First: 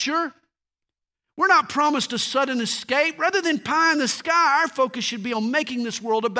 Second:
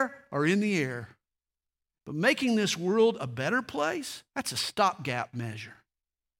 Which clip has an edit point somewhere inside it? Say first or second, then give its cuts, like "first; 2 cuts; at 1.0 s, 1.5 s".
second; 2 cuts; at 2.0 s, 4.3 s